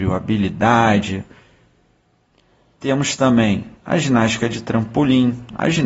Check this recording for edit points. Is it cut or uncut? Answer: uncut